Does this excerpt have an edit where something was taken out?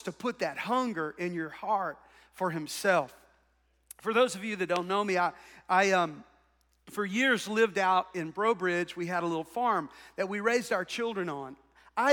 no; 0 cuts

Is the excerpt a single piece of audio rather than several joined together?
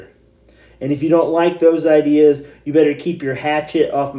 yes; 0 cuts

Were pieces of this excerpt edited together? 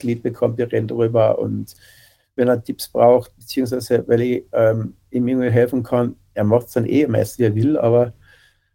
no; 0 cuts

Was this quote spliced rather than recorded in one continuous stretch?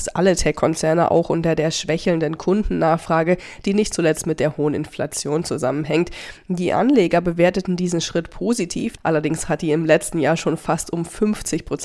yes; 1 cut; at 9.0 s

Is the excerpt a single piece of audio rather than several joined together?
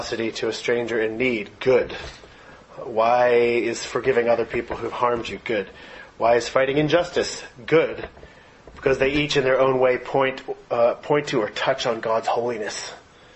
yes; 0 cuts

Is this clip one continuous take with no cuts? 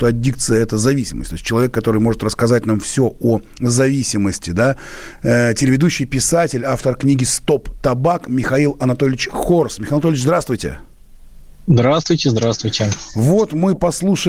yes; 0 cuts

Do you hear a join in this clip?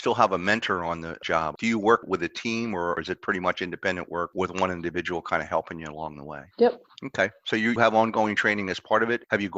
yes; 1 cut; at 6.5 s

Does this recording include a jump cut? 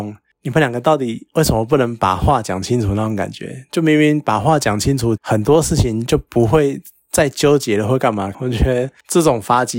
yes; 2 cuts; at 5.2 s, 8.3 s

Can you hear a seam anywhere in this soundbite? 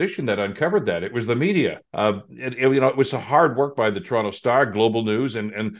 yes; 1 cut; at 1.8 s

